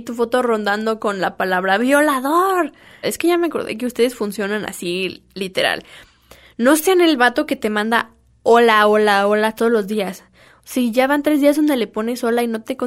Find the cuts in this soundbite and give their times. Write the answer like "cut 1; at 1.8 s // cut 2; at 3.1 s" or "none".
cut 1; at 3.0 s